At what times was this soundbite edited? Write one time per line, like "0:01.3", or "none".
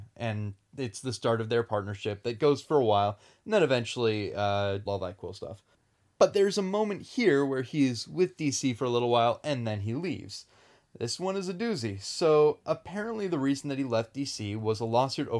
0:04.9